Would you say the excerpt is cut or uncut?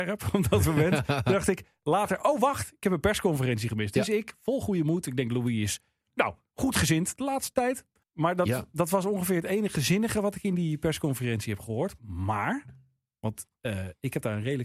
cut